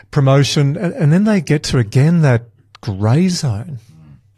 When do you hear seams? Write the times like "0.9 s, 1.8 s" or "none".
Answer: none